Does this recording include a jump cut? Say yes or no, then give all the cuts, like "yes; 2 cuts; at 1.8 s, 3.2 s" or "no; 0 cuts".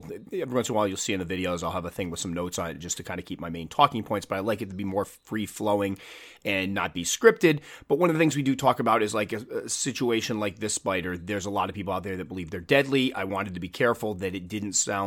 no; 0 cuts